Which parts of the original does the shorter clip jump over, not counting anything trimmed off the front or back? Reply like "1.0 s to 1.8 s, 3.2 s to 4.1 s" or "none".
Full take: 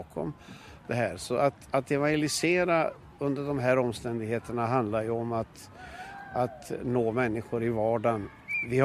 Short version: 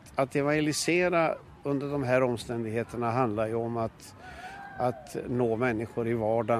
none